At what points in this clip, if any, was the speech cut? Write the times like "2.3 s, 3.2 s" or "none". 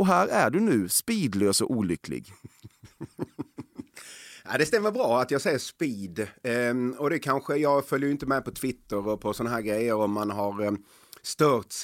none